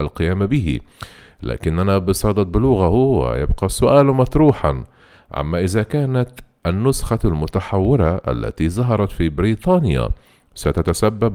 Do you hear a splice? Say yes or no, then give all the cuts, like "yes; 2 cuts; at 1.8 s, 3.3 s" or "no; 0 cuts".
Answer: no; 0 cuts